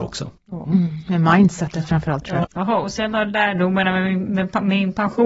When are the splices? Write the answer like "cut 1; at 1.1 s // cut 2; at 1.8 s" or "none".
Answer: cut 1; at 2.4 s